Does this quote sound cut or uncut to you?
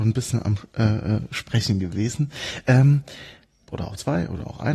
cut